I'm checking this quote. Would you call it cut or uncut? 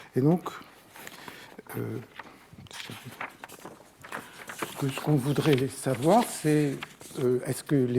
uncut